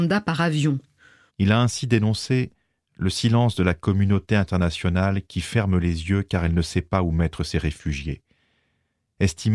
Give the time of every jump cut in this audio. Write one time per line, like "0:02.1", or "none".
0:01.3